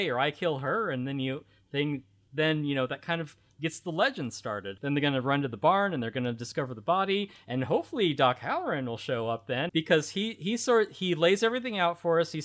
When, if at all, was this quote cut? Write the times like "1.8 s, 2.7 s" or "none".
4.8 s, 9.7 s